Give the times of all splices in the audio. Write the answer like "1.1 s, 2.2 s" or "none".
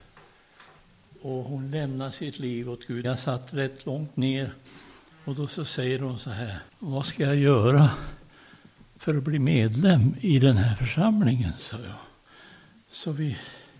3.0 s, 6.7 s, 11.6 s